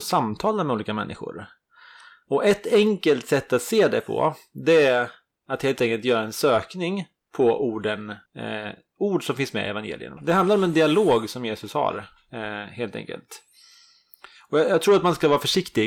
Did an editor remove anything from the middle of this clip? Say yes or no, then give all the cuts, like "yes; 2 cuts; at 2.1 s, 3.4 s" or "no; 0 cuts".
yes; 2 cuts; at 8.3 s, 10.2 s